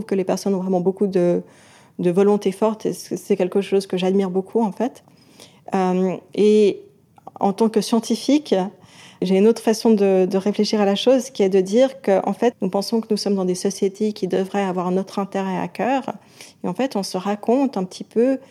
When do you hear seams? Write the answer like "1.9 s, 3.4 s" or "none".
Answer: 12.5 s